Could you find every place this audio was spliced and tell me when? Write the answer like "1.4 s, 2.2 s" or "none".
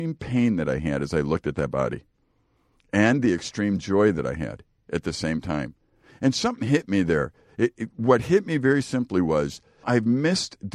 9.8 s